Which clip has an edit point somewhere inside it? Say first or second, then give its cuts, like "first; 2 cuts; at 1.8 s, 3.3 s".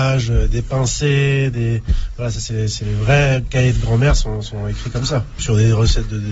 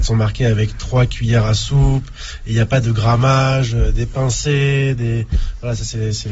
first; 1 cut; at 5.4 s